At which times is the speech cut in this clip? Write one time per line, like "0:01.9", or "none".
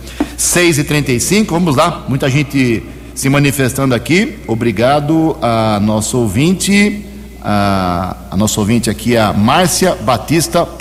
none